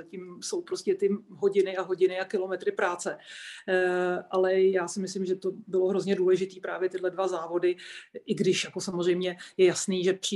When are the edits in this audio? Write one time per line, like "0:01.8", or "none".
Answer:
none